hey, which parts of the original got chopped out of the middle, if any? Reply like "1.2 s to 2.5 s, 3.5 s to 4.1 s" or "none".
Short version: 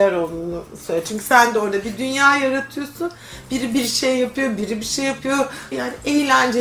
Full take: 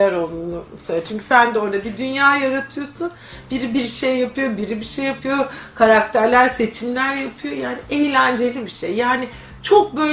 5.7 s to 7.6 s